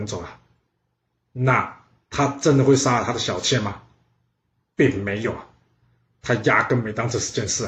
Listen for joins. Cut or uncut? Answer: uncut